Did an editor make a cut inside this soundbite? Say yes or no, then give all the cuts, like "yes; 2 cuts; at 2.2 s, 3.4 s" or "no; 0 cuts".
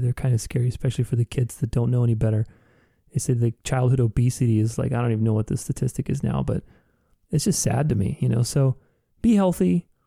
no; 0 cuts